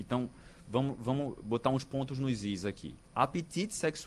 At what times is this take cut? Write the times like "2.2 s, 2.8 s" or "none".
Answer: 3.0 s